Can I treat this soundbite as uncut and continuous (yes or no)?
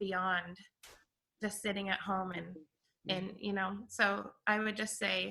yes